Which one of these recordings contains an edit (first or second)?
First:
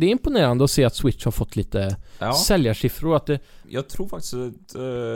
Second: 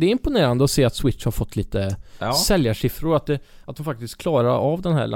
first